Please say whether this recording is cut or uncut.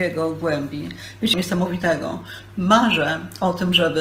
cut